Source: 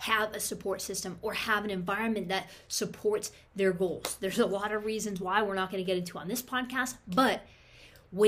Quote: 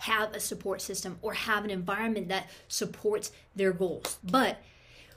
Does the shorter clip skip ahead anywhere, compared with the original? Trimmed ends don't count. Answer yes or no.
yes